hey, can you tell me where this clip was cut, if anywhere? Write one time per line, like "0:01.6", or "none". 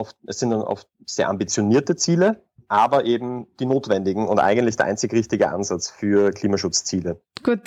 none